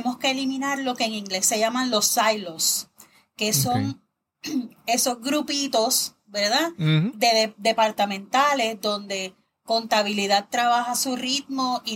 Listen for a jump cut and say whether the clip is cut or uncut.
uncut